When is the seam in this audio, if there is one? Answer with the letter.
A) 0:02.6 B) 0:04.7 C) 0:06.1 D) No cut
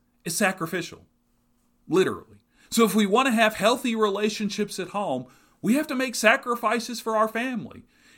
A